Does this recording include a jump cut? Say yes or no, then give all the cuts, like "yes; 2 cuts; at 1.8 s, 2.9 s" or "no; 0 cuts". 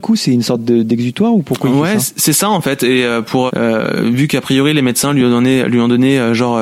yes; 1 cut; at 3.5 s